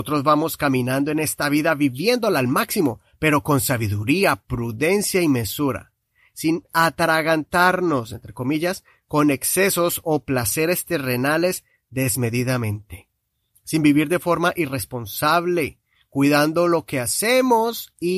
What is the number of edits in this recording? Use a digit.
0